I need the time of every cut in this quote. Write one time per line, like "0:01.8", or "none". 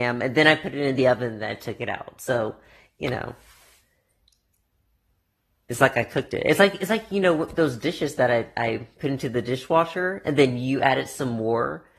none